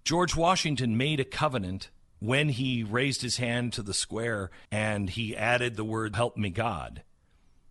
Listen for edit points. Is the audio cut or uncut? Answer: cut